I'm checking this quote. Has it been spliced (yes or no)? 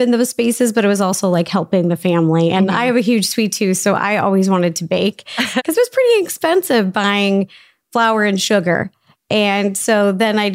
no